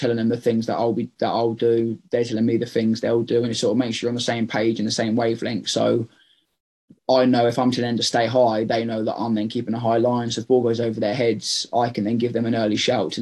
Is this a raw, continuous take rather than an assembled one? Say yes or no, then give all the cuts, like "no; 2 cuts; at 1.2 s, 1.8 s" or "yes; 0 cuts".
yes; 0 cuts